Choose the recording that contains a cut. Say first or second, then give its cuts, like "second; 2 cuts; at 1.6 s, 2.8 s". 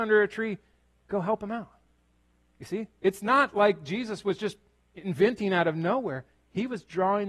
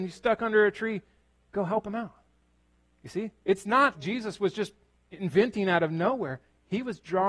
second; 1 cut; at 3.9 s